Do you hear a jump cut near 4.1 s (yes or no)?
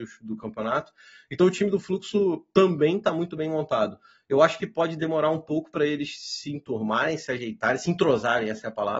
no